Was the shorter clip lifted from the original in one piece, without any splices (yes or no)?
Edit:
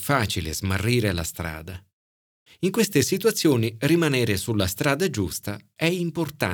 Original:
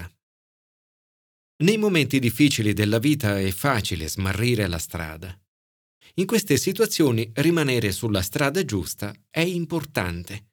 yes